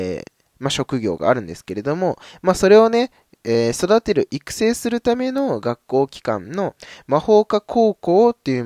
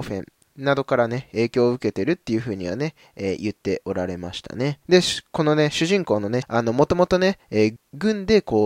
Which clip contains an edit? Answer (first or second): second